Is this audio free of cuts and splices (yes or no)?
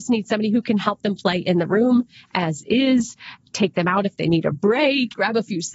yes